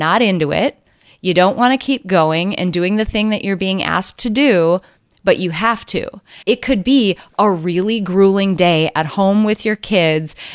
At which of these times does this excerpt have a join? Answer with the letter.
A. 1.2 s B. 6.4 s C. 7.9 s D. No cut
B